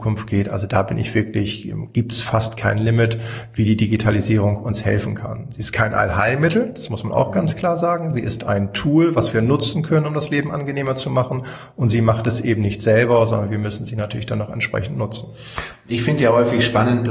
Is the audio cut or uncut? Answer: uncut